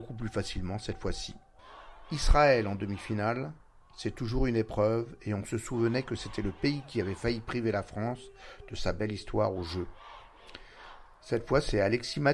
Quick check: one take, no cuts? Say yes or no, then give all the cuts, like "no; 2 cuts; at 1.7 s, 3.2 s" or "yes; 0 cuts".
yes; 0 cuts